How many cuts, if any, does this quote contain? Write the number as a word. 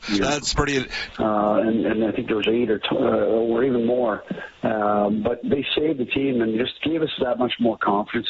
one